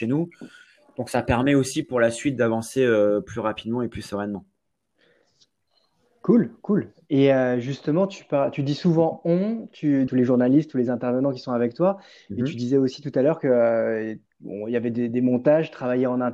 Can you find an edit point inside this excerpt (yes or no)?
yes